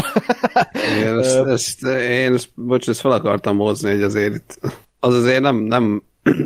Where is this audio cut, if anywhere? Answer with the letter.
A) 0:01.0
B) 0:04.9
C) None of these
B